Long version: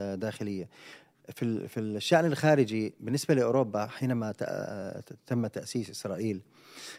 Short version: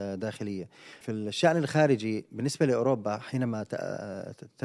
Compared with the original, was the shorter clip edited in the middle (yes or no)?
yes